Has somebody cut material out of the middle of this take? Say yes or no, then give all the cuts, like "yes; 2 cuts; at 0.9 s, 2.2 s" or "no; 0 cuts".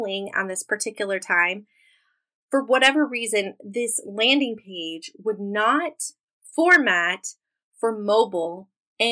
no; 0 cuts